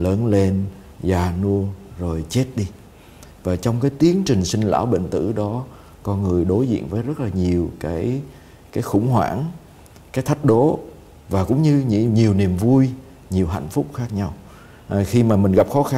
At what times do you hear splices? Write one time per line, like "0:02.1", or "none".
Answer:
none

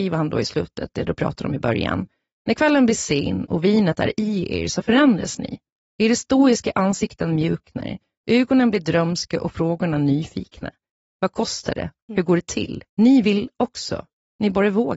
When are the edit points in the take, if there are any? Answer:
0:12.9

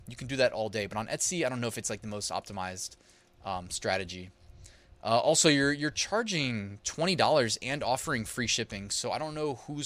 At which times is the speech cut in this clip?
none

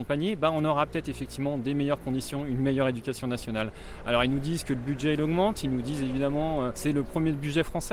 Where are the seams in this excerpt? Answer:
0:06.7

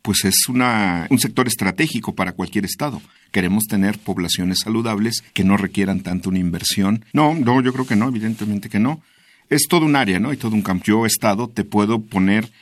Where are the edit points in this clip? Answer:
0:05.3
0:07.1
0:10.8

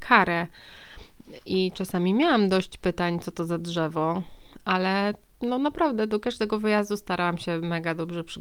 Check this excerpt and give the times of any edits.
none

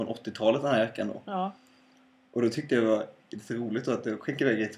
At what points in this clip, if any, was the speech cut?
none

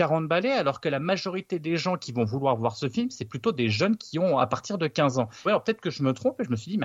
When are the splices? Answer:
0:05.5

